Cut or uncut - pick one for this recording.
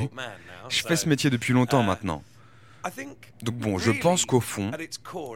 uncut